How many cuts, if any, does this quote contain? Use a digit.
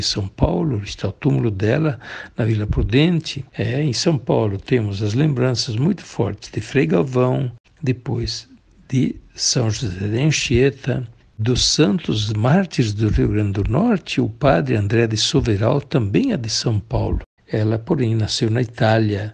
3